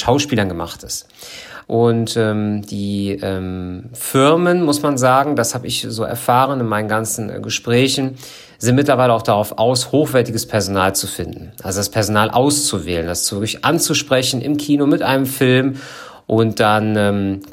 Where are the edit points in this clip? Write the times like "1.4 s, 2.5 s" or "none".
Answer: 1.6 s